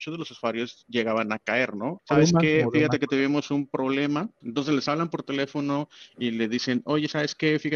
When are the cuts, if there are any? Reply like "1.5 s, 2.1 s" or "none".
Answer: 2.0 s, 4.4 s